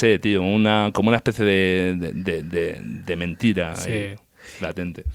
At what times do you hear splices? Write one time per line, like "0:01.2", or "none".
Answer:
none

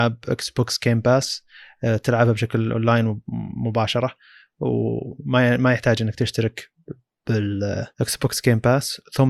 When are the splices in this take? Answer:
0:07.9

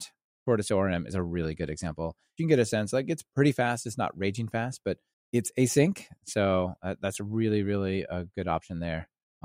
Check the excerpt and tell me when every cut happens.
0:02.4

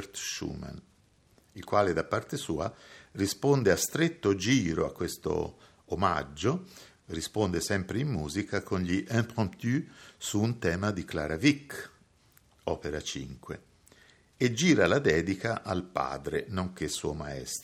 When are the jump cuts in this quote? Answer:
none

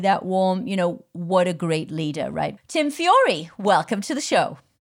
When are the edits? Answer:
0:02.6

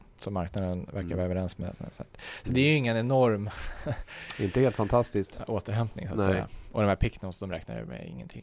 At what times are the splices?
none

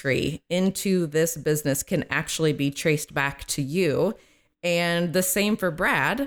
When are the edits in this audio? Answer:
none

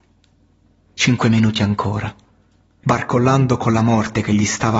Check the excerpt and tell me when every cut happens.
0:02.8

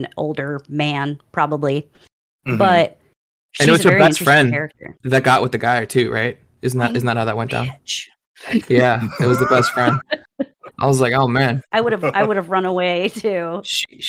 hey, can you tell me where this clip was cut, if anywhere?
0:05.0

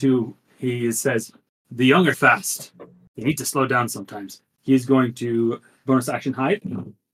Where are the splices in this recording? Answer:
0:02.1

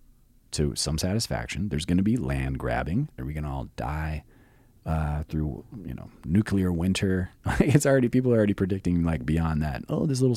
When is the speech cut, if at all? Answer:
0:03.2

